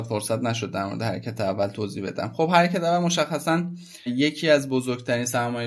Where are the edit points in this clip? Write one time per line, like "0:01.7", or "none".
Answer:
0:04.1